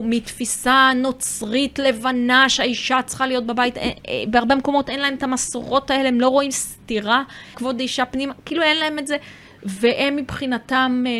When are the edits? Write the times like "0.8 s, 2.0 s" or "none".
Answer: 7.5 s

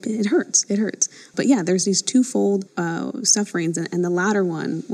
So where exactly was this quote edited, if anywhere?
2.7 s

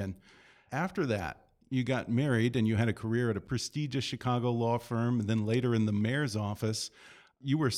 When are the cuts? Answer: none

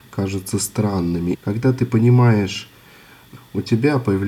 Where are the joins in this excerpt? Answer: 1.3 s, 3.4 s

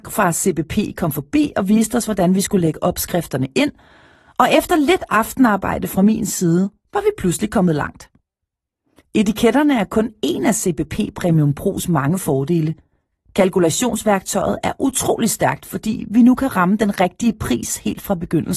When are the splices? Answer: none

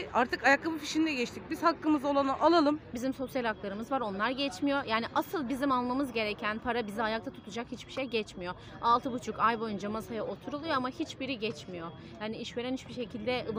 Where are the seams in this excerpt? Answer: 2.9 s

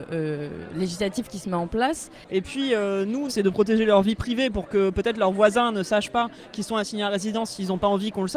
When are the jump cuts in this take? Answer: 2.3 s, 3.3 s

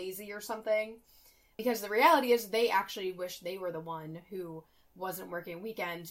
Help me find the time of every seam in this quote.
none

